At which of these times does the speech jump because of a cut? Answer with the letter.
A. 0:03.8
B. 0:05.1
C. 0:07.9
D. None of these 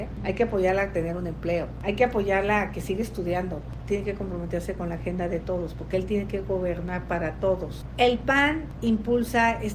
A